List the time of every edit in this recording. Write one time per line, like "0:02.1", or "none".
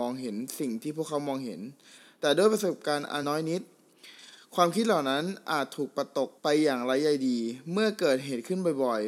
0:03.2
0:06.4